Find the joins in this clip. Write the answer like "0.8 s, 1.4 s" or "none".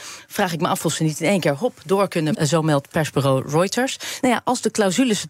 2.3 s, 4.2 s